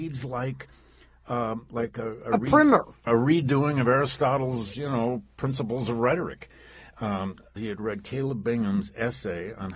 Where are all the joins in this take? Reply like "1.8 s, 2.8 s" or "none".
3.1 s, 7.6 s

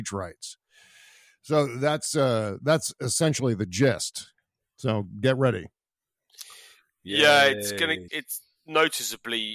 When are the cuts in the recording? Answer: 8.1 s

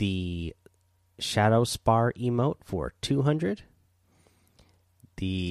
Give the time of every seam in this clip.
none

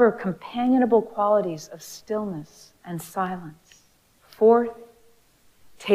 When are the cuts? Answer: 4.1 s

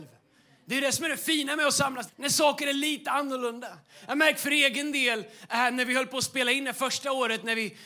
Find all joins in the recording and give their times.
2.1 s

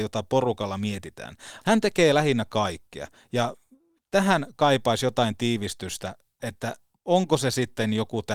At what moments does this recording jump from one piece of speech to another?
1.6 s

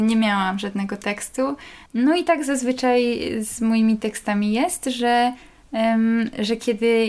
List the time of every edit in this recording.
1.9 s

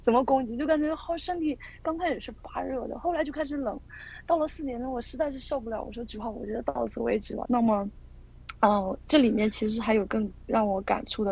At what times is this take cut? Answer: 7.4 s

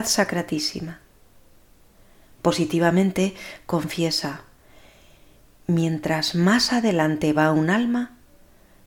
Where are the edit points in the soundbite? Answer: none

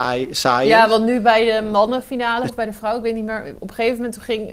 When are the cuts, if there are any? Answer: 2.5 s

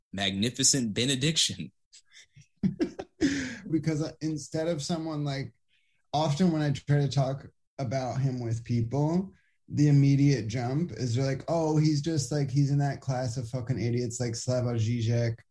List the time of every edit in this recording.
3.7 s

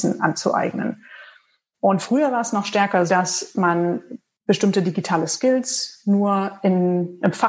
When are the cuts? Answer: 3.1 s

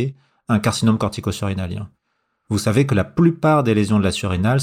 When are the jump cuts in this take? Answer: none

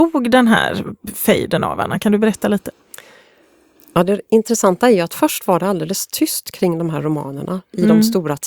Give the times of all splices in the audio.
none

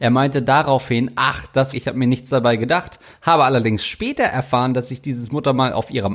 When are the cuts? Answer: 1.7 s

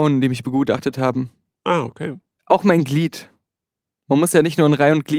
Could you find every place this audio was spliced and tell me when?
none

